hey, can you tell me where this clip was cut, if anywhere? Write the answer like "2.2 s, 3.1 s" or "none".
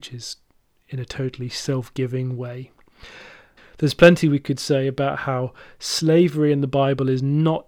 3.6 s

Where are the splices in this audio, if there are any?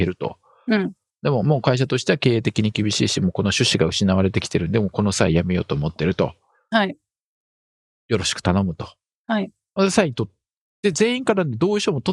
none

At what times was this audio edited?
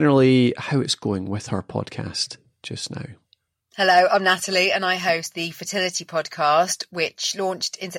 none

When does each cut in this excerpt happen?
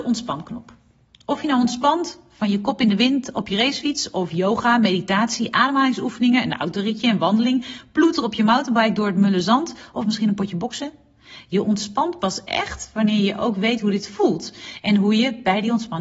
none

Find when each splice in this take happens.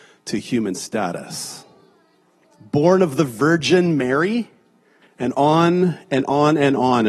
5.0 s

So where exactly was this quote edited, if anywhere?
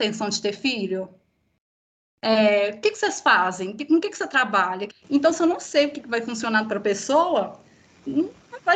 4.9 s

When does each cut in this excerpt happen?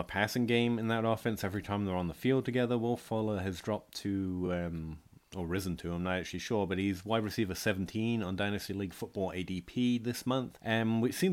none

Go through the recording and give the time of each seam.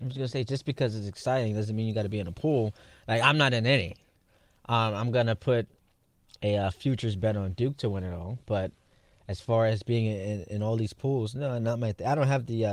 none

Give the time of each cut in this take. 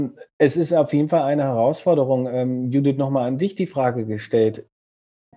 none

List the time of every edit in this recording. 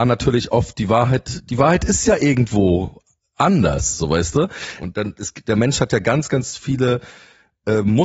4.8 s

